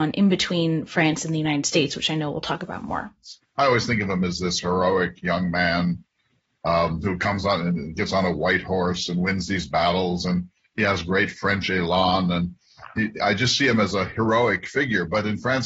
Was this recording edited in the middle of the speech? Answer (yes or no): no